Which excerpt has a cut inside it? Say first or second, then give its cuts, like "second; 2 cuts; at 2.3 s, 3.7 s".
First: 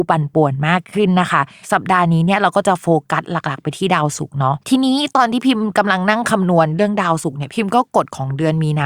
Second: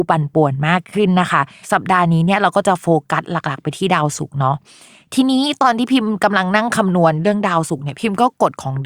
first; 1 cut; at 4.6 s